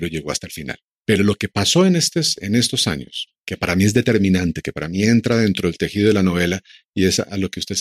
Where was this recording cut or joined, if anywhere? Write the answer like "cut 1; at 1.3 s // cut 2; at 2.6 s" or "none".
none